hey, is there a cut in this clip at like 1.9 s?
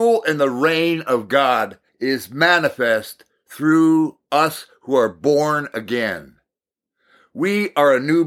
yes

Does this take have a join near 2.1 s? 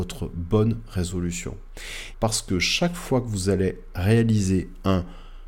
yes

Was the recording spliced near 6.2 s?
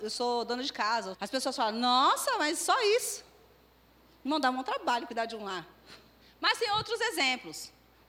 yes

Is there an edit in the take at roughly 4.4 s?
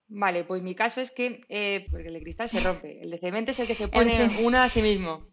no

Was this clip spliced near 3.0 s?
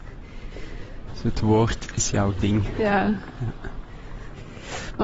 no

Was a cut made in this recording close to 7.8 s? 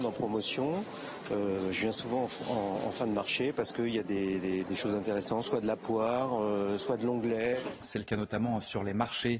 yes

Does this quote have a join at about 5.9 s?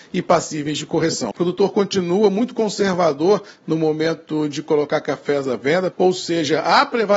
yes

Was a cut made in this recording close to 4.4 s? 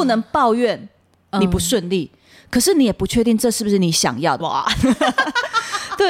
yes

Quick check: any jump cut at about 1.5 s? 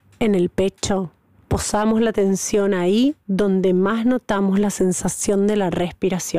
yes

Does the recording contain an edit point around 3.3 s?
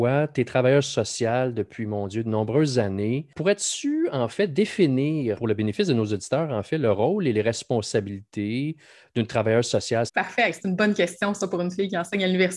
no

